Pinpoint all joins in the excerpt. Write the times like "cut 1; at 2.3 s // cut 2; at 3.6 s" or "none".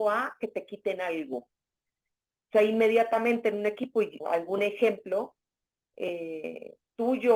cut 1; at 4.2 s